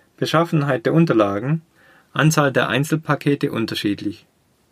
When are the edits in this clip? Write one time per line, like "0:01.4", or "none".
none